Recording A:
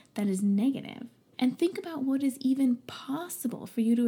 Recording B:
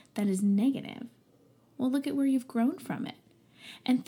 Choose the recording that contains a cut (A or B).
A